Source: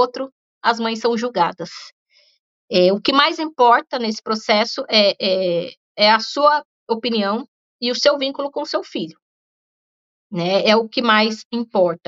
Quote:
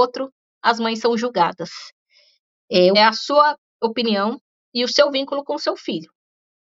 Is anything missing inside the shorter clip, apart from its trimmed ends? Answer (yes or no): yes